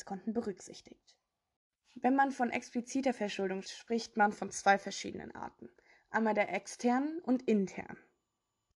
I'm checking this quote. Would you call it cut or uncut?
cut